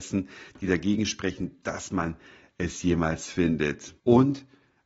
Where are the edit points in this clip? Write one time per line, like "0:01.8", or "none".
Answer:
0:04.0